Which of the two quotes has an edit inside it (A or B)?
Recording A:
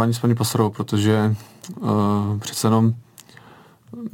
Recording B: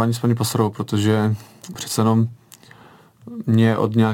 B